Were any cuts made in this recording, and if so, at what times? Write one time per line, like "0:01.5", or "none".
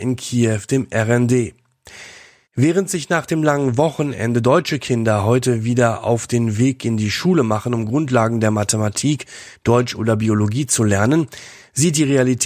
none